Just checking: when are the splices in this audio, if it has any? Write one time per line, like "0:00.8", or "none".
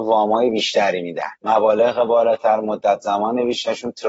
0:01.4